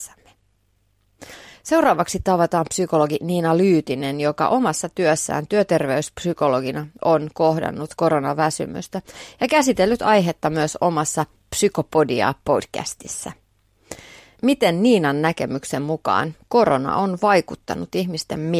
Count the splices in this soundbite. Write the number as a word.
zero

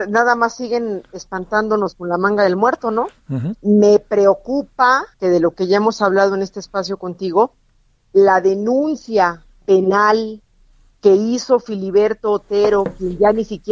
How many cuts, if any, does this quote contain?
two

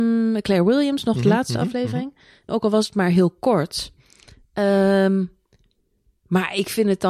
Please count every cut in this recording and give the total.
one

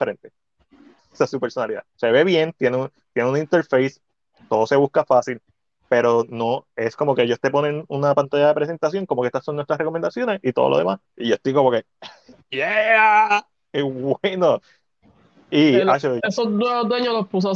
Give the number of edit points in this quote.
three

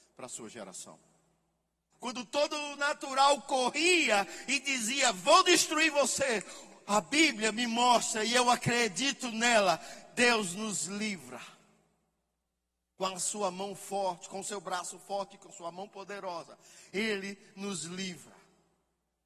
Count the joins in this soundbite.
one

